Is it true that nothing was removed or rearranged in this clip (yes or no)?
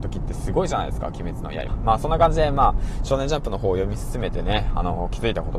no